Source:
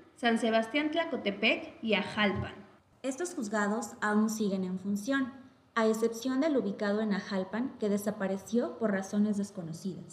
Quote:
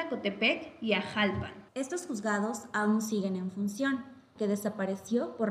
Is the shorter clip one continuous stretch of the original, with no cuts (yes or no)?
no